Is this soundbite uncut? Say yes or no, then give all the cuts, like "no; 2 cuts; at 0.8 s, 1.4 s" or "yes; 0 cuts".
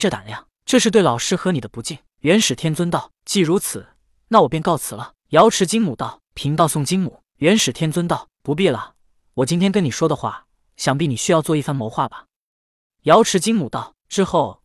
no; 1 cut; at 12.9 s